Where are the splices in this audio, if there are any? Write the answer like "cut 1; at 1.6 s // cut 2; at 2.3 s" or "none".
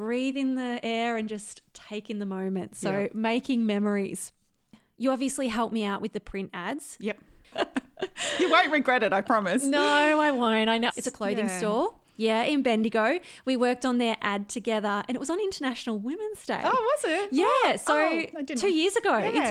cut 1; at 7.5 s // cut 2; at 10.9 s